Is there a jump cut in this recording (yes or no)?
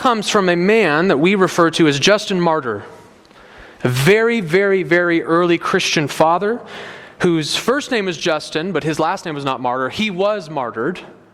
no